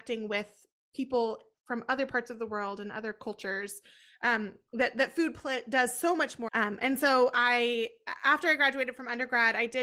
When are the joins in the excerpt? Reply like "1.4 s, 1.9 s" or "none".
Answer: 6.5 s